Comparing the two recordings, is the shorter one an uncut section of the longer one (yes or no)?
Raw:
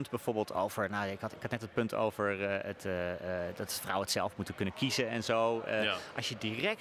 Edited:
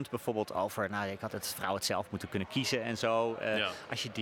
no